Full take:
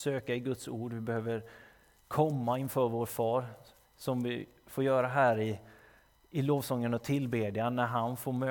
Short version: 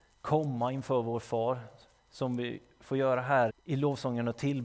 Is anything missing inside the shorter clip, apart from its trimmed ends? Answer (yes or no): yes